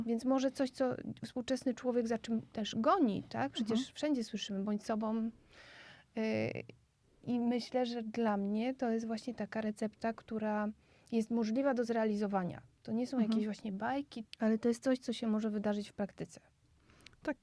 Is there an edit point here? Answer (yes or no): yes